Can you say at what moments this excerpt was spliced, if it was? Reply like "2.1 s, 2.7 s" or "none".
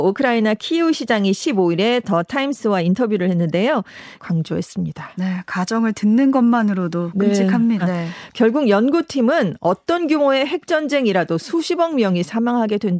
4.2 s, 7.8 s